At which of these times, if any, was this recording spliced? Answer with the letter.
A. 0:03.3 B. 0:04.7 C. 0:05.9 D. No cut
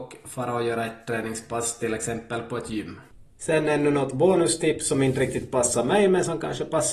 D